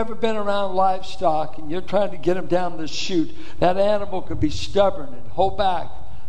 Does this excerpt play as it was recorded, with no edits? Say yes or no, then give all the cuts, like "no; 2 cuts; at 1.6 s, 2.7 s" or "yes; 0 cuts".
yes; 0 cuts